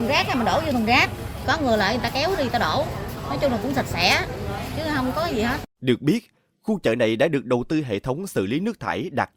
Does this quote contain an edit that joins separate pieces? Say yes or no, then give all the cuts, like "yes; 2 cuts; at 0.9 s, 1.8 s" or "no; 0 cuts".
yes; 1 cut; at 5.7 s